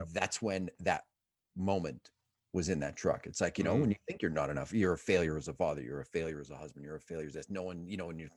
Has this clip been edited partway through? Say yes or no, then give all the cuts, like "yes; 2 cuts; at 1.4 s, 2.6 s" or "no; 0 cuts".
no; 0 cuts